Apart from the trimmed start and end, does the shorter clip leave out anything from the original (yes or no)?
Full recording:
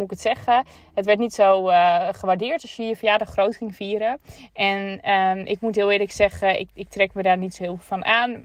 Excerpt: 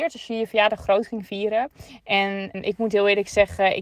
yes